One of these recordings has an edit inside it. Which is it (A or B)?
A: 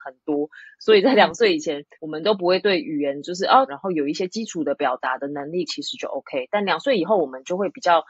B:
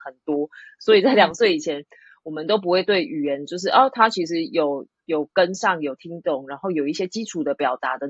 A